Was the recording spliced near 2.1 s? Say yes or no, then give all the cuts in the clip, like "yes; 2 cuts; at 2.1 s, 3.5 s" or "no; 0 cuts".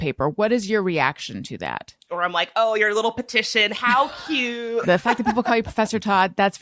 yes; 2 cuts; at 2.1 s, 4.8 s